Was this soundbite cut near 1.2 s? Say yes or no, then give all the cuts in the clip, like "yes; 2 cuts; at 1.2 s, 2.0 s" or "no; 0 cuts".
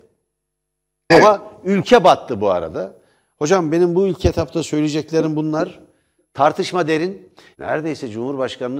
no; 2 cuts; at 3.3 s, 7.5 s